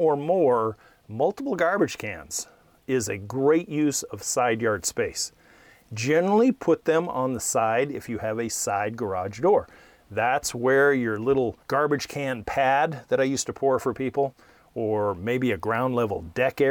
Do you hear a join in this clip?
no; 0 cuts

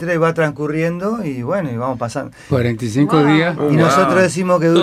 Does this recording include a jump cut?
yes; 1 cut; at 2.5 s

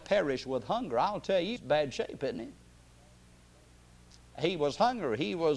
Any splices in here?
yes; 1 cut; at 1.6 s

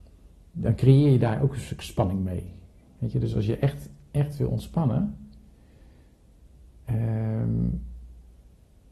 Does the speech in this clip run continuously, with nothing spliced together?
yes; 0 cuts

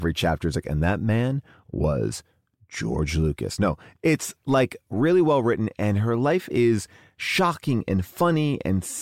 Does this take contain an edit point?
no; 0 cuts

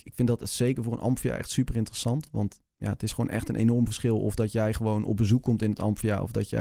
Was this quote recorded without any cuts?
yes; 0 cuts

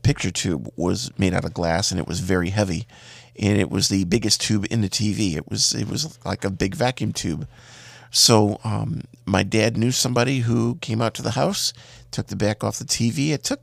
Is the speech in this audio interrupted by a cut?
no; 0 cuts

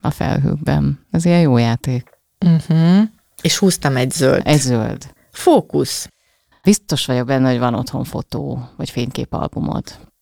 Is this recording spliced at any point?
no; 0 cuts

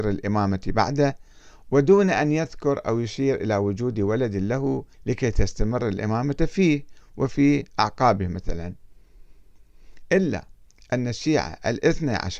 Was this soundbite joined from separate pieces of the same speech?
yes; 1 cut; at 4.9 s

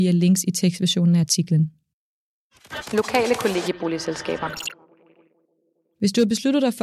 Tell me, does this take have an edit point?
no; 0 cuts

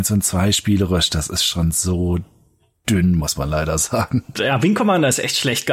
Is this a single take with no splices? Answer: no; 1 cut; at 4.4 s

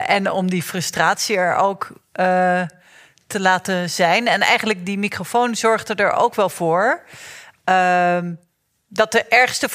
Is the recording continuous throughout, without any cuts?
yes; 0 cuts

